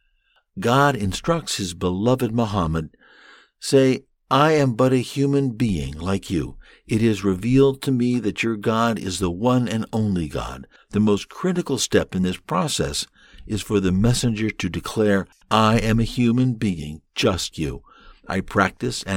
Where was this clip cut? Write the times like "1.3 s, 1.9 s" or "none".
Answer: 10.8 s, 17.5 s

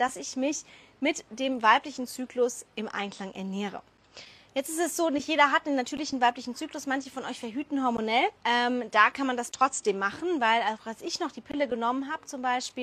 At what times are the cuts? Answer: 8.4 s

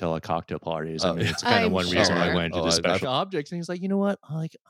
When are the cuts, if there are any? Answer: 3.0 s

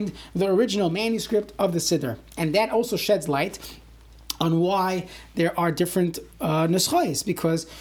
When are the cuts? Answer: none

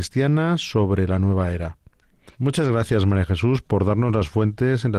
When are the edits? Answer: 2.3 s

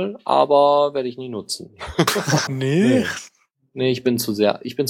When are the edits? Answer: 2.5 s

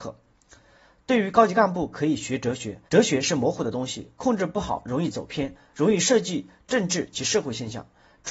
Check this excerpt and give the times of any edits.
2.9 s

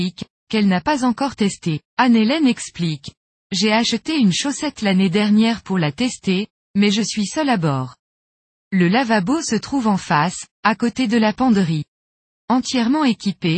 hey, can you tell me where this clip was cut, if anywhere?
1.9 s, 8.5 s

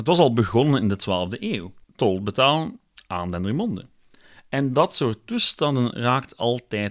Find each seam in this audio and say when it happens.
1.8 s

